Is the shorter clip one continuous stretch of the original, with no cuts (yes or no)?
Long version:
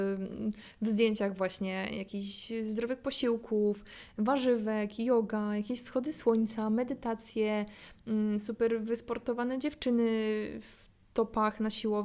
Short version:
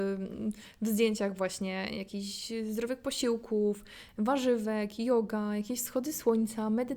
yes